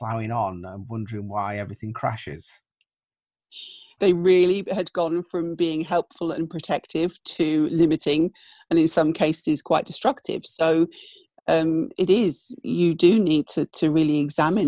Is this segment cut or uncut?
cut